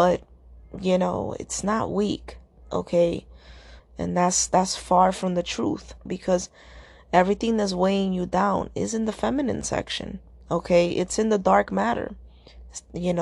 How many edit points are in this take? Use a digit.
2